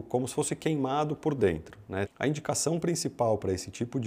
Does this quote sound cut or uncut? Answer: cut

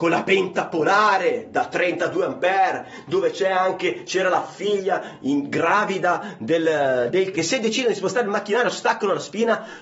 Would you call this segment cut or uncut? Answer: cut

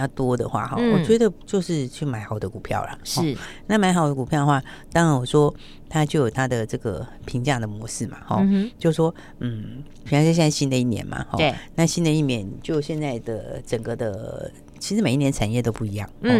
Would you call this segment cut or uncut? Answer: uncut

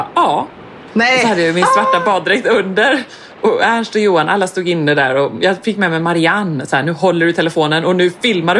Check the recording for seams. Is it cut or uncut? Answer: uncut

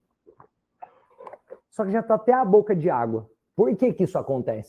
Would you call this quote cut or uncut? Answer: cut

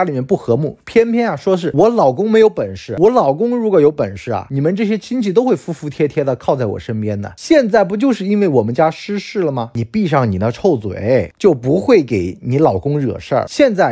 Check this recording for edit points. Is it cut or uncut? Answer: uncut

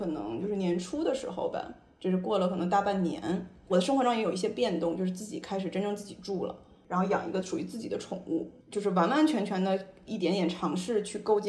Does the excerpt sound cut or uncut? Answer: cut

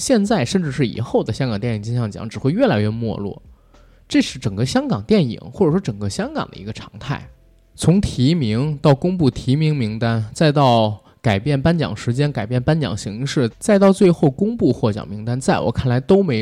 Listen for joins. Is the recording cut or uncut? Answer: uncut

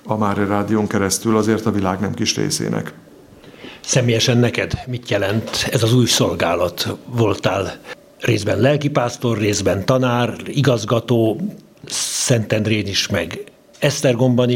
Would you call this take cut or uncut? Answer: uncut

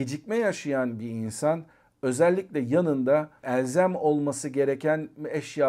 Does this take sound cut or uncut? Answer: uncut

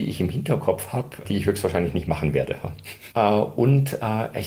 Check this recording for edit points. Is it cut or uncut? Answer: cut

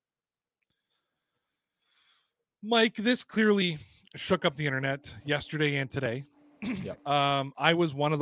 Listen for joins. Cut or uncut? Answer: uncut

